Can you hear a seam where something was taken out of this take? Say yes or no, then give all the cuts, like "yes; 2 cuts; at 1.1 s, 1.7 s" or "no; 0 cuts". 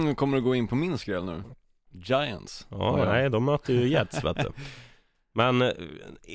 yes; 1 cut; at 1.9 s